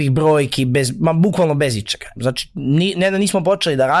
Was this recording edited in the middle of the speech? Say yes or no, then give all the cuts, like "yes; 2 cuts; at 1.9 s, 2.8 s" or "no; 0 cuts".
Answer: yes; 1 cut; at 2.2 s